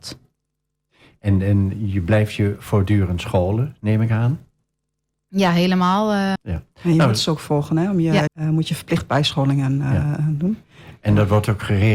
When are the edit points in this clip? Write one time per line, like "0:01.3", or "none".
0:06.4
0:08.3